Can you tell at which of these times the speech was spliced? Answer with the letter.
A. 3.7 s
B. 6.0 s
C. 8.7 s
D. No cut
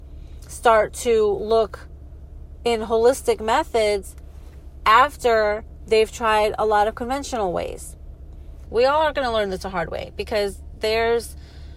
C